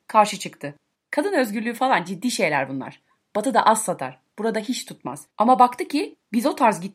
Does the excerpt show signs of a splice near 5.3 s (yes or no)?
yes